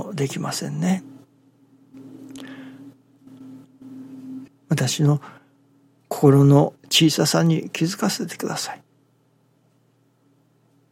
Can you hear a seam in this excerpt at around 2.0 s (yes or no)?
no